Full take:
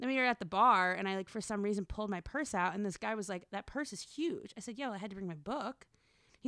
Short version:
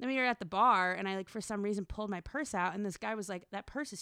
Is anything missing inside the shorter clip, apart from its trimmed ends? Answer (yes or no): no